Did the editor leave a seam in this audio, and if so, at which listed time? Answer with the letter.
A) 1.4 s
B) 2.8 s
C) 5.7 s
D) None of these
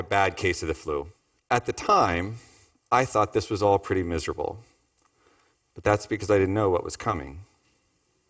A